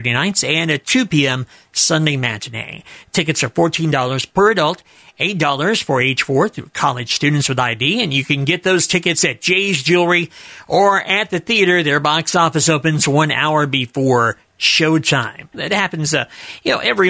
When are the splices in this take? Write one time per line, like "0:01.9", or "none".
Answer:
0:15.5